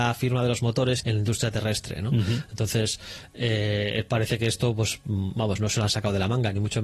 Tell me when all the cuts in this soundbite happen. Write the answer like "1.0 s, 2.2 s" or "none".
1.0 s